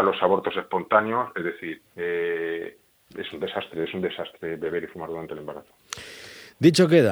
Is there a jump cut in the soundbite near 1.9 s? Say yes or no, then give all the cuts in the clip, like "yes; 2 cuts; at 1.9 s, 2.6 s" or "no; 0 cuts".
yes; 1 cut; at 1.9 s